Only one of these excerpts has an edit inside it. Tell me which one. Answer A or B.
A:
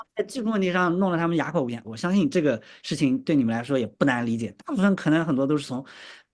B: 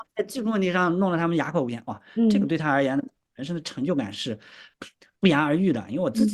A